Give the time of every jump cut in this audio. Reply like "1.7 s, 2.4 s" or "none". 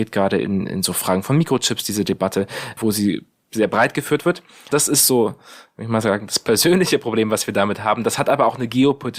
4.7 s